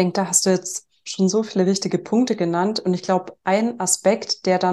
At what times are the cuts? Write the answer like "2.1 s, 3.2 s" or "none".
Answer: none